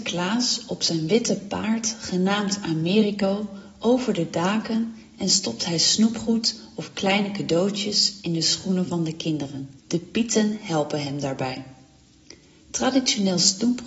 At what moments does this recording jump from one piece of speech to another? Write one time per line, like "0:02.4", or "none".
0:09.8